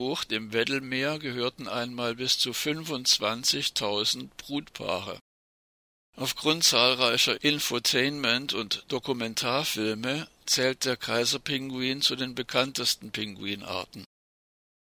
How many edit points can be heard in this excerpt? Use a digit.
1